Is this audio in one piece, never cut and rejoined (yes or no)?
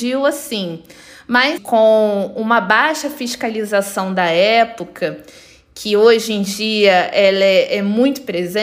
no